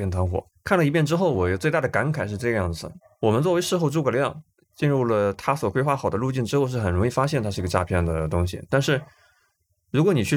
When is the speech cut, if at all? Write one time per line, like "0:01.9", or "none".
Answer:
none

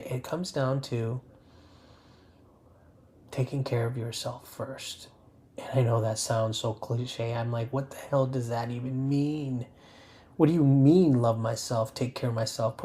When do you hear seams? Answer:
none

